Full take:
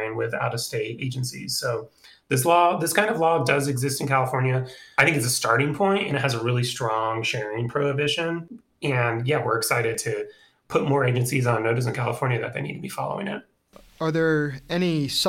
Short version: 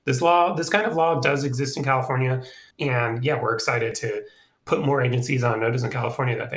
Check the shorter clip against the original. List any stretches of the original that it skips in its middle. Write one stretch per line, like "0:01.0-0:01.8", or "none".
0:04.9-0:08.7